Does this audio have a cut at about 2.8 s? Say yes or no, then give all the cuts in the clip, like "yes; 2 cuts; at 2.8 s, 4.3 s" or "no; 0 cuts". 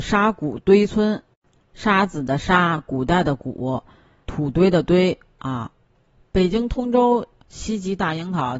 no; 0 cuts